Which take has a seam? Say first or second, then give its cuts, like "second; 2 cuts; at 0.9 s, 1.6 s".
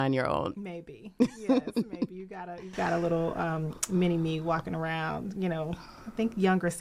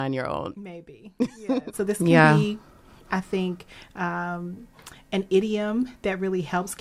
second; 1 cut; at 1.7 s